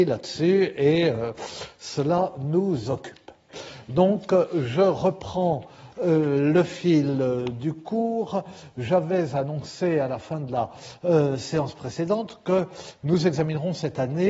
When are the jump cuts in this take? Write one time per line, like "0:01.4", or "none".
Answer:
none